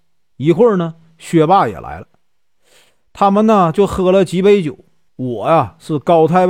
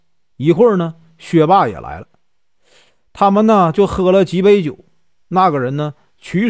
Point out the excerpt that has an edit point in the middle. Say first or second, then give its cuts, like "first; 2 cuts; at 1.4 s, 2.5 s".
first; 1 cut; at 5.1 s